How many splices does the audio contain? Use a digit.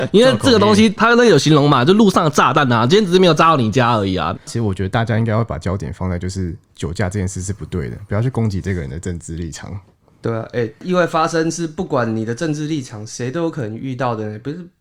1